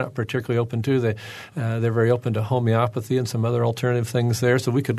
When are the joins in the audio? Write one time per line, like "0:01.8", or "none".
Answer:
none

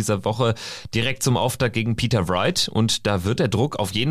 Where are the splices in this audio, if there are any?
none

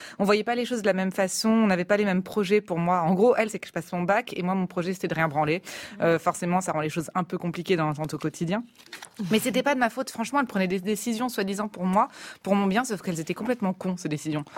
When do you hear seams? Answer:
0:03.5

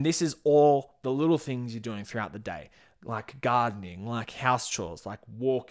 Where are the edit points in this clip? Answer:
none

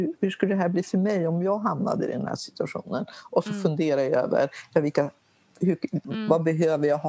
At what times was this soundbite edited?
0:06.0

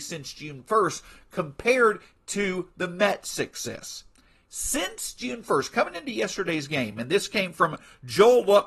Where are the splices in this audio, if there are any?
none

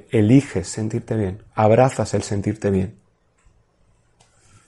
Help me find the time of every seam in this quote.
none

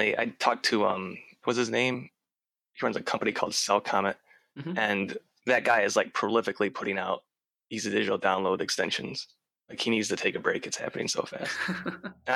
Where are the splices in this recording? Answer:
0:01.4

